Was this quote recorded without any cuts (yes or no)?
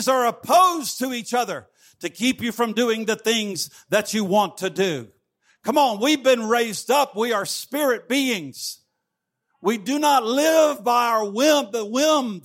yes